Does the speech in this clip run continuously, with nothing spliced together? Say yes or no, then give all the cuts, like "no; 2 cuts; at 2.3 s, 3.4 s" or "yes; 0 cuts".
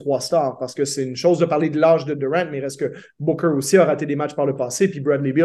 yes; 0 cuts